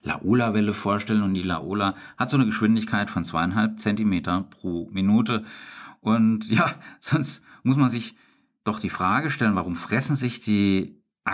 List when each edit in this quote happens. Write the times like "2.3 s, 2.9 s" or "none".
none

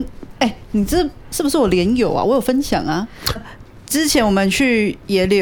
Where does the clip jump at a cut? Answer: 3.4 s

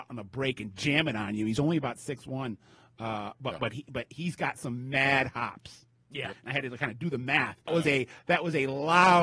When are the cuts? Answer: 6.3 s, 7.7 s

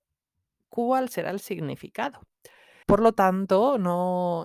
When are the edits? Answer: 2.8 s

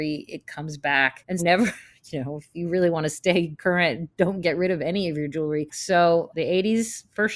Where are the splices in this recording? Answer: 1.4 s, 5.7 s

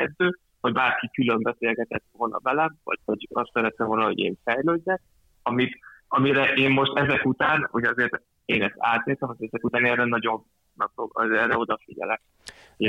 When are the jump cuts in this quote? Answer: 3.0 s

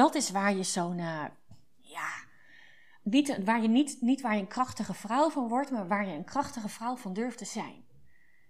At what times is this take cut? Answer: none

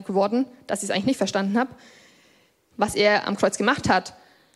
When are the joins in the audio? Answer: 2.7 s

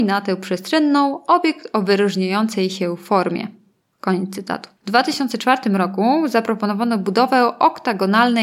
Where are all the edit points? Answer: none

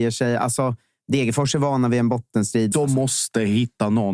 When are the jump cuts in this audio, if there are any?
2.7 s

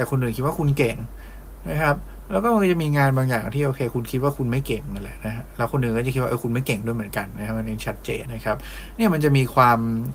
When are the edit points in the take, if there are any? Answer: 8.3 s

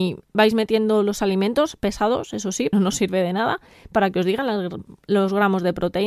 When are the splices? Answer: 2.7 s

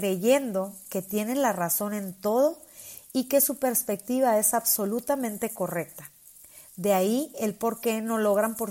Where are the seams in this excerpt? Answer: none

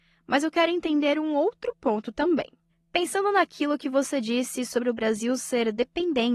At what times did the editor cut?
none

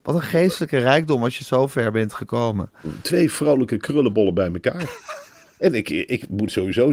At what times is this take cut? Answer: none

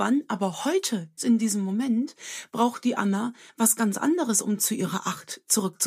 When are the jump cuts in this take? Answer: 1.2 s

